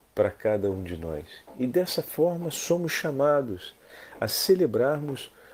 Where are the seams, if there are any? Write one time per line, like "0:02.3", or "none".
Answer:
none